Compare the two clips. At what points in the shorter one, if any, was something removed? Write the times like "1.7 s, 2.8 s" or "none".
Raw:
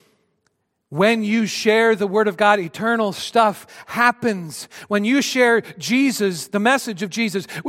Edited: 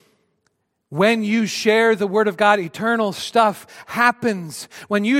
none